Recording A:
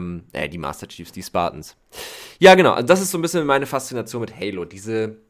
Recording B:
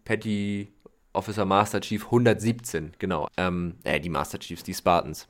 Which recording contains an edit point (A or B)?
B